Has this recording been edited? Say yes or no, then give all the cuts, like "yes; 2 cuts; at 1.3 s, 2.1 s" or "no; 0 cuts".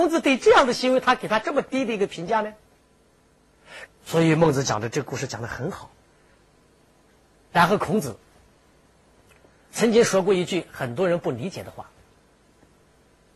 yes; 1 cut; at 3.9 s